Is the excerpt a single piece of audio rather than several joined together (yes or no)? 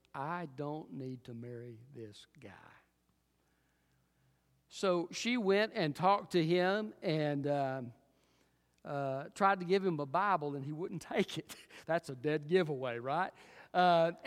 yes